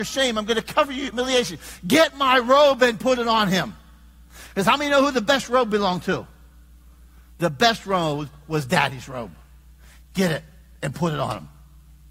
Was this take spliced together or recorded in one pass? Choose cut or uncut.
uncut